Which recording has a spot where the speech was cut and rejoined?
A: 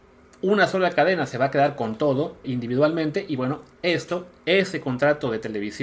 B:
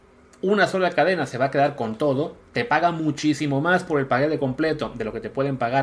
A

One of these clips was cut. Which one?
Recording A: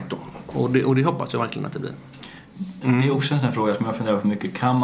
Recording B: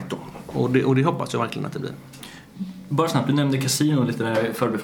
A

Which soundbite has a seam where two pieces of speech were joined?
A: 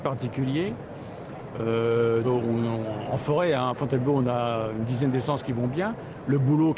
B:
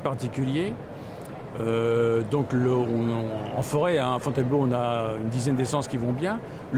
A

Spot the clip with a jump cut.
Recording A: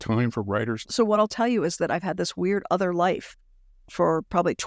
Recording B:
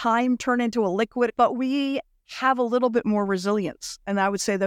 B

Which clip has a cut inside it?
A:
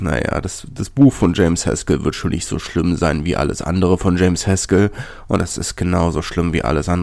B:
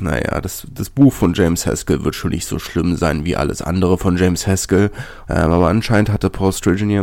B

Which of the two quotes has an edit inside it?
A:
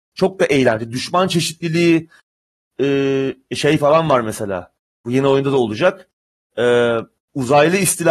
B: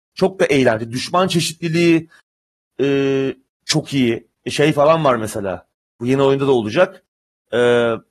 A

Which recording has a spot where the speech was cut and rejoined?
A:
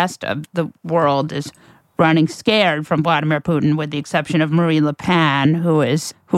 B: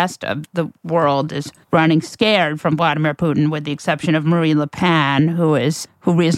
B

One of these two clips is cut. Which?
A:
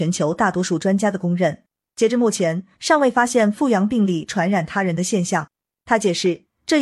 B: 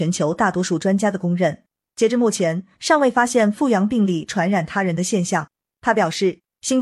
A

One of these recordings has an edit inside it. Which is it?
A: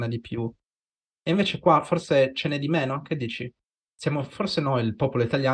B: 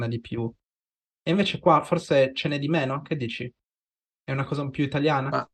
A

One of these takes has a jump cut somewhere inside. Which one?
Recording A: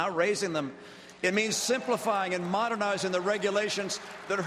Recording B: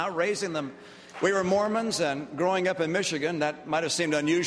B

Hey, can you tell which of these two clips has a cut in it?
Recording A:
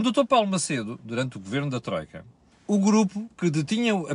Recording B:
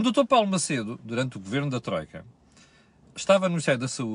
A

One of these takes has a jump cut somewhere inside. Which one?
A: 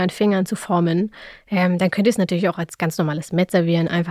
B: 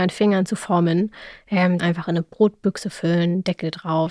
B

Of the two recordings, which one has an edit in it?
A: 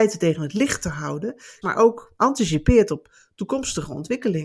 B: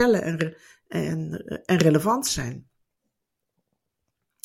A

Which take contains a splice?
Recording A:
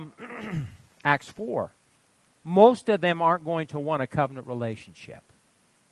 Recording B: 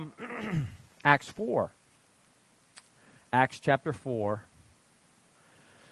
A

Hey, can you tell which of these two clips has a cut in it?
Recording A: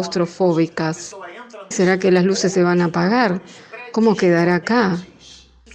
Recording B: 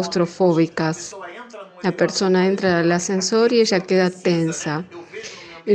A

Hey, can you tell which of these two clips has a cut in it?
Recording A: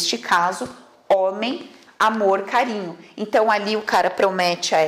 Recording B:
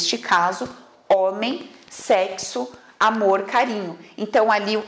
A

